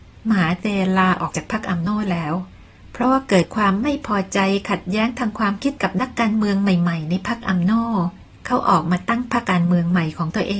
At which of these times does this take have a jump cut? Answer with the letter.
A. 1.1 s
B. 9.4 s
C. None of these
B